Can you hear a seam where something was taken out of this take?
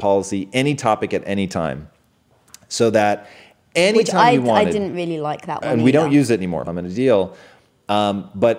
yes; 1 cut; at 6.7 s

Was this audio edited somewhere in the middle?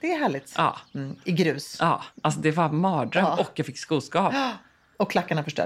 yes; 1 cut; at 2.1 s

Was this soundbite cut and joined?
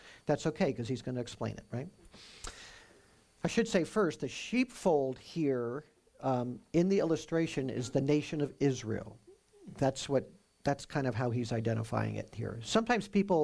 no; 0 cuts

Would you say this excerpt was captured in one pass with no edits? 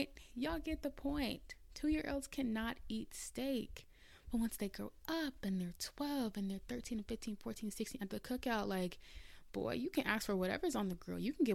yes; 0 cuts

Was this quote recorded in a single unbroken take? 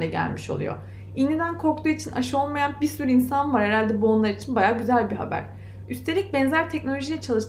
yes; 0 cuts

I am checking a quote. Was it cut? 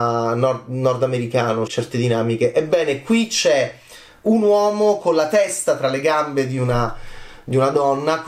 yes; 1 cut; at 1.7 s

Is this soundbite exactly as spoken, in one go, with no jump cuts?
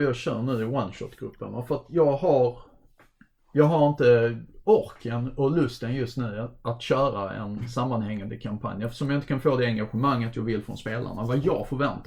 yes; 0 cuts

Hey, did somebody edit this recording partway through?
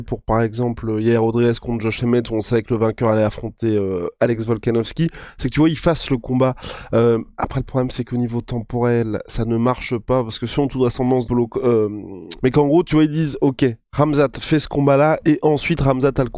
yes; 2 cuts; at 11.3 s, 12.4 s

